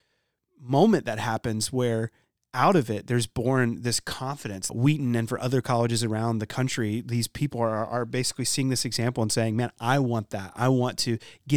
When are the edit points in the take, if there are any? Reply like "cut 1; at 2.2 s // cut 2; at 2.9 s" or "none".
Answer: cut 1; at 4.7 s